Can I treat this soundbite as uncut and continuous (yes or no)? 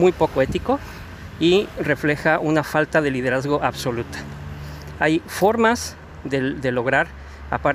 yes